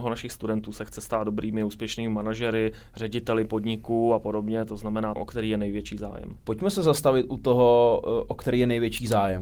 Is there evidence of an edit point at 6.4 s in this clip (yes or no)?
yes